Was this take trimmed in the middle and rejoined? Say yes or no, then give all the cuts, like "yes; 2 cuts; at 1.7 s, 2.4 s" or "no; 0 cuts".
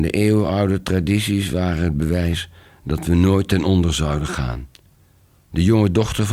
no; 0 cuts